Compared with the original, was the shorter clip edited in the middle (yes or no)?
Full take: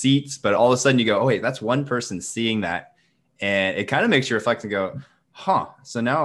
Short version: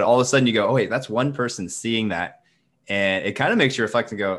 no